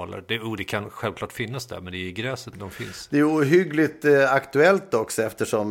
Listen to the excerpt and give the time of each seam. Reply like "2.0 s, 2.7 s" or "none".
2.5 s